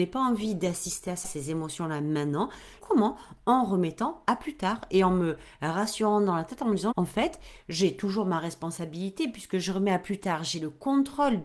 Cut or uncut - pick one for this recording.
cut